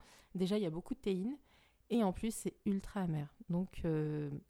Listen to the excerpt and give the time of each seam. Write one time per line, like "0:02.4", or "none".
none